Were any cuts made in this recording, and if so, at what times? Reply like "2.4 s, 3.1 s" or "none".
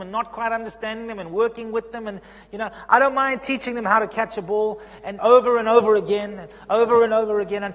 5.2 s